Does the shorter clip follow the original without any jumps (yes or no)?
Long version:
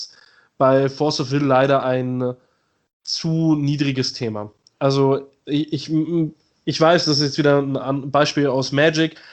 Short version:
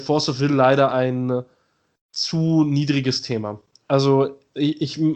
yes